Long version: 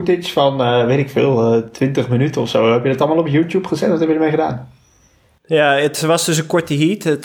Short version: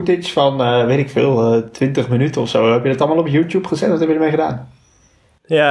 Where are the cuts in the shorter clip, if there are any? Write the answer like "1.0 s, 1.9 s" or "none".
none